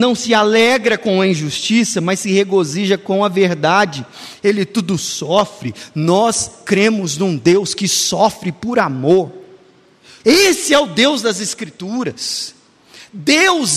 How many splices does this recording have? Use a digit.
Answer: 1